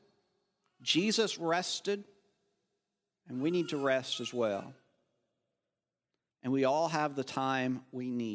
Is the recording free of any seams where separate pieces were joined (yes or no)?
no